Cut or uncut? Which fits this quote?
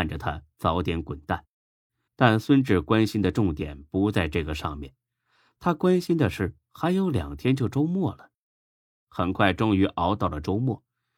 cut